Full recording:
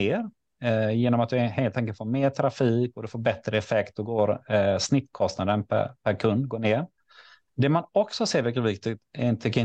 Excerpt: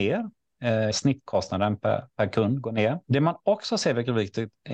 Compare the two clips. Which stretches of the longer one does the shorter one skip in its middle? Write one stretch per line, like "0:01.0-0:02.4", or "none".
0:00.9-0:04.8
0:06.9-0:07.5